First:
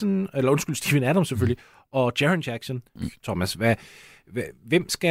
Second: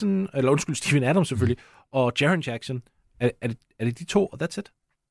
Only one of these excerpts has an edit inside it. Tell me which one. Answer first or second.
first